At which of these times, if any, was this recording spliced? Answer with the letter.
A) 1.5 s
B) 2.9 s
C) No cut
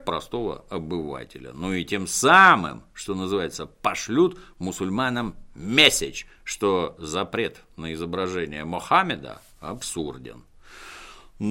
C